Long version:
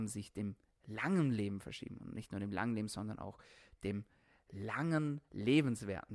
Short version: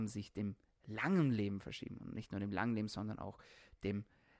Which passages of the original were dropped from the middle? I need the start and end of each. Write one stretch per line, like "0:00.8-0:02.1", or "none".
none